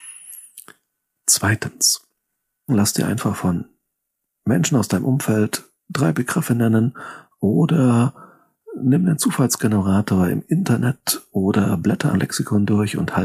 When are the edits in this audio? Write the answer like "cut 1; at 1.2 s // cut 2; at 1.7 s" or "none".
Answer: cut 1; at 2.7 s // cut 2; at 12.1 s

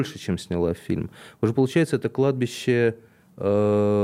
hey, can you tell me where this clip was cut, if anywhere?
none

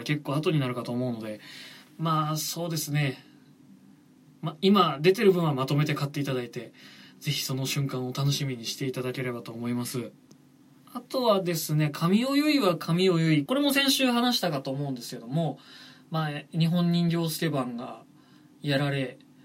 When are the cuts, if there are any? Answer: cut 1; at 13.5 s

